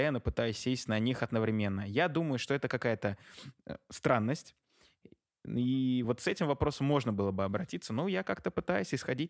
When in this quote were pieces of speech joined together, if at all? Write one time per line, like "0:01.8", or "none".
none